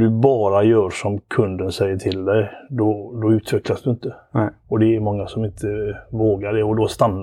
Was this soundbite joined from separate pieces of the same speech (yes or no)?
yes